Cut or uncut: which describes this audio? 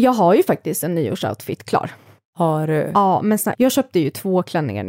cut